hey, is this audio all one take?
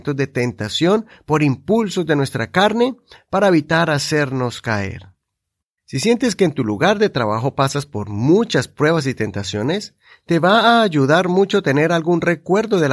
no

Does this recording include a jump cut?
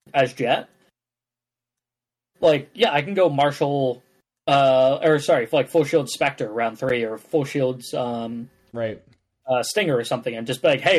no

